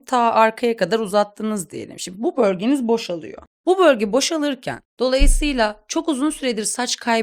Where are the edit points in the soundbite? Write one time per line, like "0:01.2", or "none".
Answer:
none

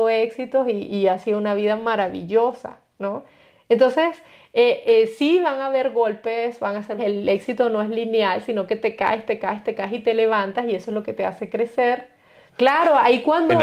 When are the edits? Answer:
0:07.0
0:12.5

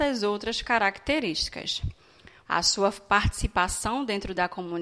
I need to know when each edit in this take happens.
0:02.4

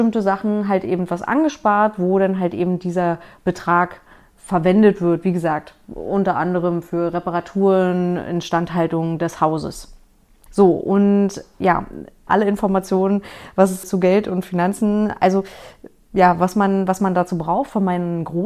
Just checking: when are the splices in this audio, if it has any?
0:10.5
0:12.3
0:13.8

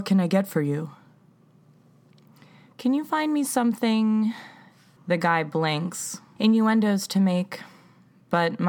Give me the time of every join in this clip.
0:05.0
0:06.4

